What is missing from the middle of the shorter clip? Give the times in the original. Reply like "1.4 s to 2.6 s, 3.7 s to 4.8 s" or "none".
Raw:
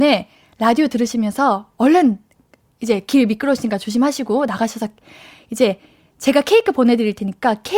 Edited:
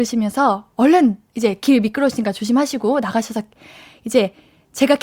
2.3 s to 2.7 s